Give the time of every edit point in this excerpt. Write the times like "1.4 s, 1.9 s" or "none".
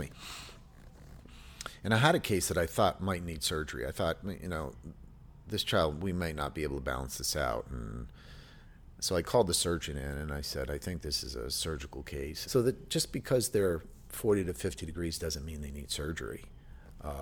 12.5 s